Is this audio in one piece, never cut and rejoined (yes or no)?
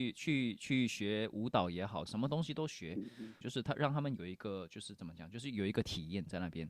no